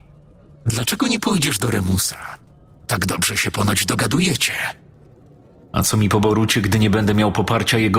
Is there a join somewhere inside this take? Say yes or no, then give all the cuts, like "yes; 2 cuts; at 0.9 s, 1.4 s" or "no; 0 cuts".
no; 0 cuts